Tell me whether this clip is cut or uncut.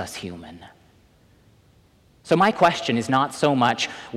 uncut